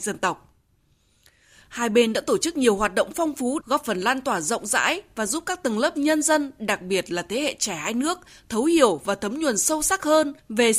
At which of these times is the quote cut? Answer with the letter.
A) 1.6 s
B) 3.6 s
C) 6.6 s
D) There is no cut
B